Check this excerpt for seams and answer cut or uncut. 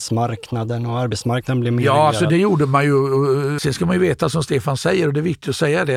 cut